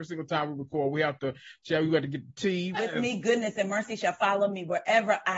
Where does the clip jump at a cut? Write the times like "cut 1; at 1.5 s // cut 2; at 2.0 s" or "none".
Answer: cut 1; at 2.7 s